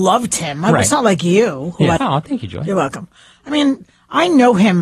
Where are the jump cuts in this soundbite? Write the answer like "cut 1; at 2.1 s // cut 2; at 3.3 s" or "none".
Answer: cut 1; at 2.0 s // cut 2; at 3.3 s